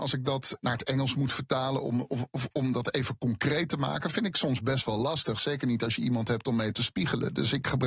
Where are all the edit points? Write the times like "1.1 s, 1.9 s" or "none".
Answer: none